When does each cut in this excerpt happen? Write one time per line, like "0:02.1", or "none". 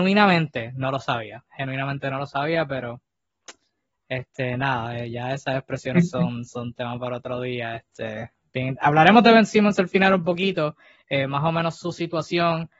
none